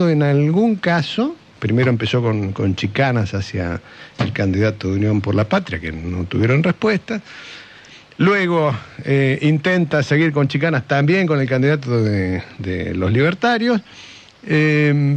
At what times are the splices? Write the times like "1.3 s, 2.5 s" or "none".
none

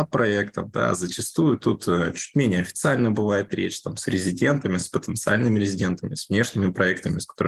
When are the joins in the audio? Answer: none

